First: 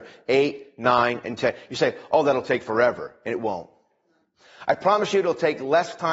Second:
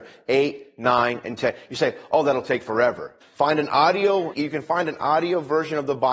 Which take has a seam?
second; 2 cuts; at 3.2 s, 4.3 s

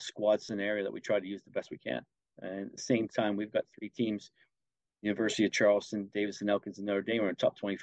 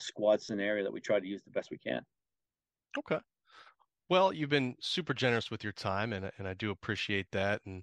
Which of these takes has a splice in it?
first; 1 cut; at 2.3 s

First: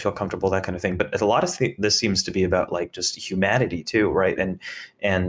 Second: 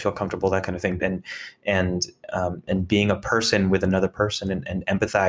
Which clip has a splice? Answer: second; 1 cut; at 1.0 s

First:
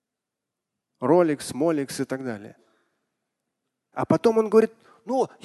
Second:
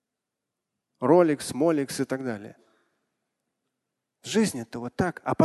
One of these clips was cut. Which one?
first; 1 cut; at 3.9 s

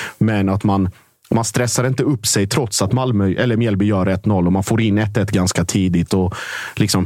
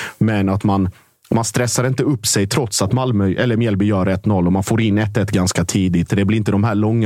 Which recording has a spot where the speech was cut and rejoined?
second; 1 cut; at 6.1 s

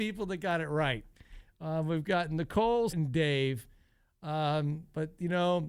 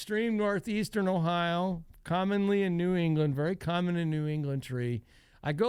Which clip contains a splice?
first; 1 cut; at 2.9 s

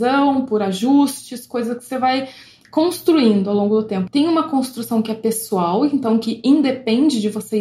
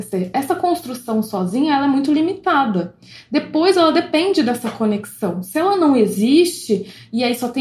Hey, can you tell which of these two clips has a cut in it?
first; 1 cut; at 4.1 s

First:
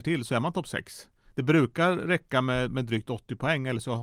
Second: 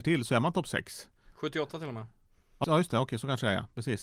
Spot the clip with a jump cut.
second; 2 cuts; at 1.3 s, 2.6 s

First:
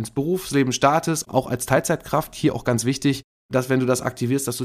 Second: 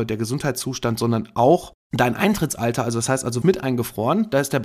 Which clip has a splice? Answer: second; 1 cut; at 3.4 s

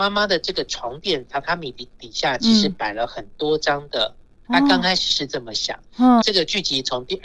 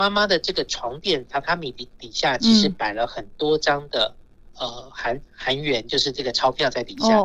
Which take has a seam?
first; 2 cuts; at 4.4 s, 6.2 s

